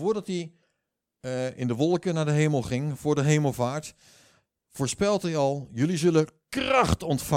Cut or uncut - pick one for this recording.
uncut